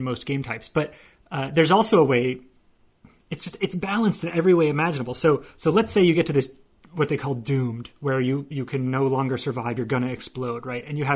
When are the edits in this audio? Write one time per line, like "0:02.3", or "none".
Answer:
none